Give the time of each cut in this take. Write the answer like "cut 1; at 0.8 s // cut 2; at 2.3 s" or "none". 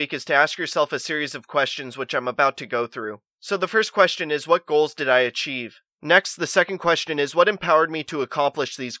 none